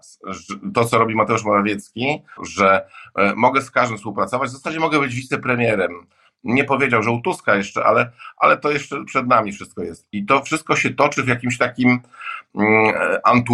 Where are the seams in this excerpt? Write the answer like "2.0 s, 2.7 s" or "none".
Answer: 2.4 s